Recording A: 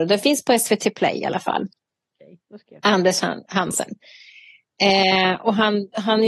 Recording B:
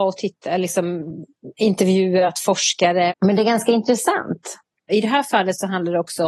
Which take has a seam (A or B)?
B